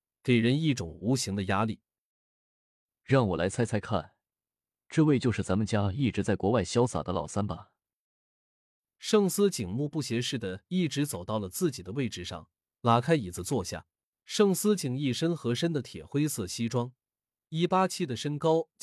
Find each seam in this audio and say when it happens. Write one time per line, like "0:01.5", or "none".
0:14.1